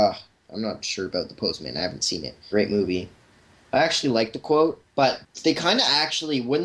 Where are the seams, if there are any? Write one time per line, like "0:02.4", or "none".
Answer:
0:02.5